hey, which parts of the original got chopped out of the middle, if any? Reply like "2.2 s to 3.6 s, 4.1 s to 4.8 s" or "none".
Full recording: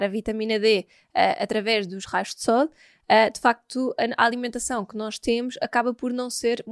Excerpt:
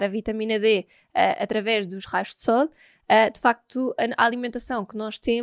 none